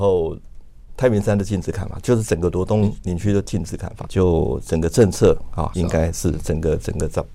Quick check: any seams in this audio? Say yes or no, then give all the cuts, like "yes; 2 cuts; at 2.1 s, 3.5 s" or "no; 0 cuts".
yes; 2 cuts; at 4.1 s, 5.7 s